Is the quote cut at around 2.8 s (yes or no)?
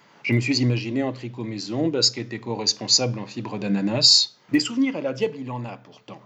no